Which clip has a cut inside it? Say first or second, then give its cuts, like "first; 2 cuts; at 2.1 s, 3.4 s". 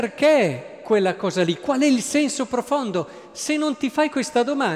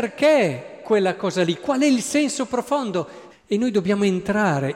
second; 1 cut; at 3.3 s